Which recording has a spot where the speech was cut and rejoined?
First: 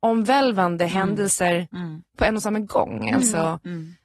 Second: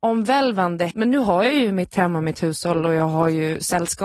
second; 1 cut; at 0.9 s

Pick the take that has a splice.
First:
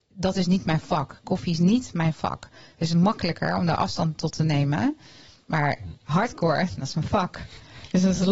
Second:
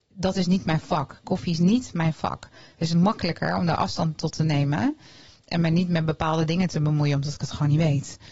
first; 1 cut; at 5.4 s

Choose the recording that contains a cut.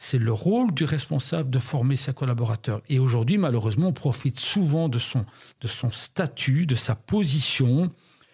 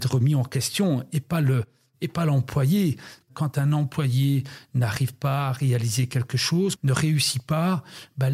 second; 2 cuts; at 3.2 s, 6.8 s

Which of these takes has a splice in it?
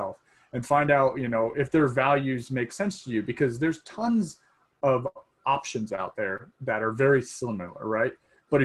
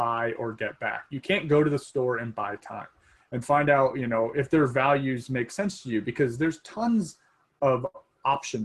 second; 1 cut; at 3.2 s

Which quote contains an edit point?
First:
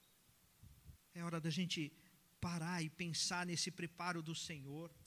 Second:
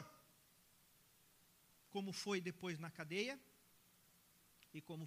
first; 1 cut; at 1.0 s

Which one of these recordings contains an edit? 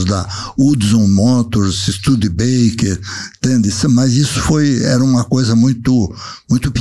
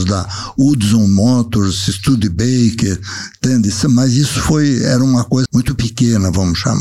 second; 1 cut; at 5.5 s

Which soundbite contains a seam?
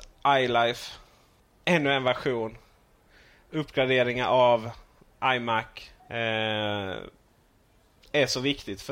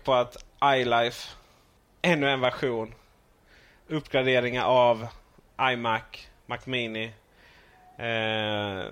first; 1 cut; at 6.0 s

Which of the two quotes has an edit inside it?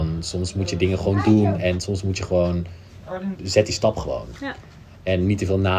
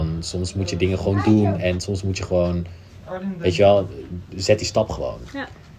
first; 1 cut; at 3.3 s

